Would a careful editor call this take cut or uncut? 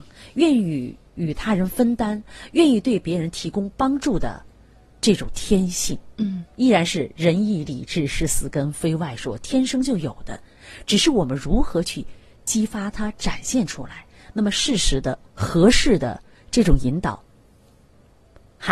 uncut